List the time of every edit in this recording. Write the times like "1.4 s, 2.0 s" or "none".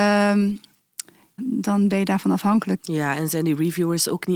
1.4 s, 2.8 s